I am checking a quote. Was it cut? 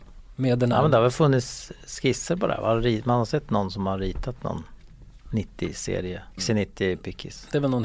yes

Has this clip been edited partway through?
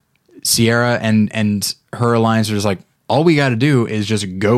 yes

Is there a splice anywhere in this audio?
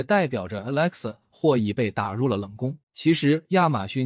yes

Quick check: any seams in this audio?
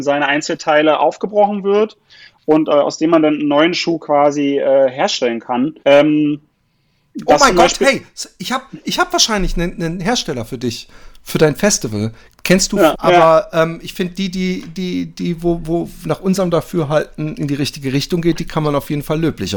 yes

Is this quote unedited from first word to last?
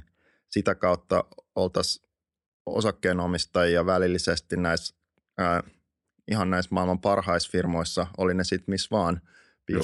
yes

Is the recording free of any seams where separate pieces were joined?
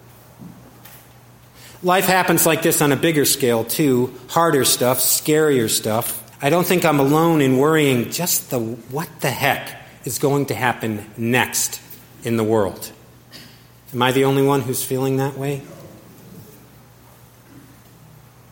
no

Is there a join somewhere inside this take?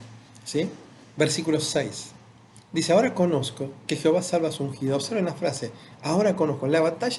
no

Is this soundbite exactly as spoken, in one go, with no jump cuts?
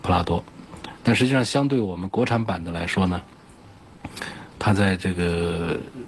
yes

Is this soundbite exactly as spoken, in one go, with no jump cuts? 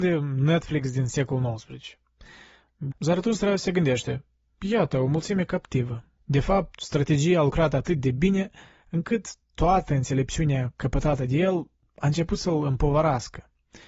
no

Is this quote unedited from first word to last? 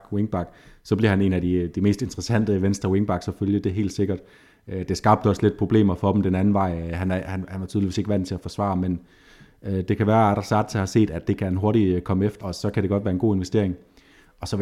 no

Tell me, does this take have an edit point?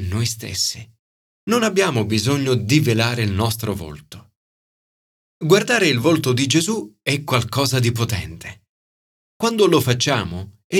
yes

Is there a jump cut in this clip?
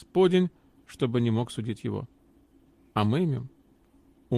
no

